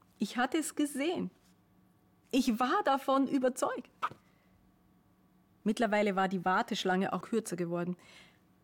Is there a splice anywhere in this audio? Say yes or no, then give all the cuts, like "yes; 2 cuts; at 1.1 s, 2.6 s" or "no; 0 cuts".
yes; 2 cuts; at 5.6 s, 7.2 s